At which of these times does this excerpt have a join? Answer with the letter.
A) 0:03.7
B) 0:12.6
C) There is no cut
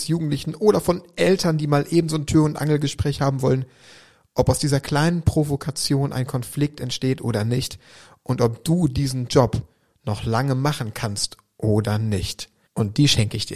B